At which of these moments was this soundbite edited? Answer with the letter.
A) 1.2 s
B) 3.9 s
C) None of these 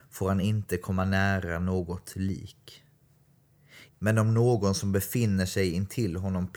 B